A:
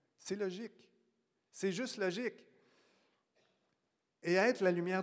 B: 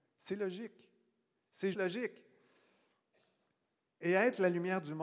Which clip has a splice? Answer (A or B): B